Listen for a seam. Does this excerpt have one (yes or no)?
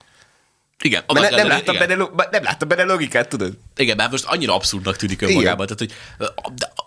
no